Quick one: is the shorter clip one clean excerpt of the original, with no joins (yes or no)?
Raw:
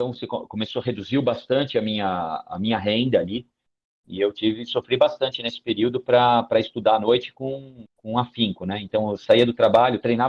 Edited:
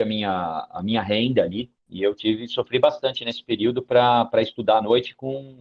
no